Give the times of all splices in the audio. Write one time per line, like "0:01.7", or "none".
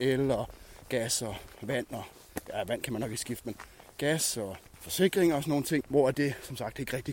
0:04.7
0:05.8